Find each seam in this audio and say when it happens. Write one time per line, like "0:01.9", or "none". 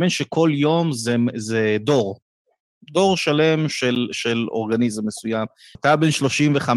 0:05.8